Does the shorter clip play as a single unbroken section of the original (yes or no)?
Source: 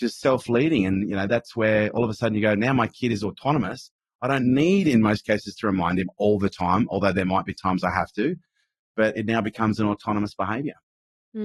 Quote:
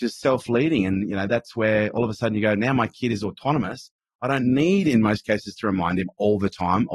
yes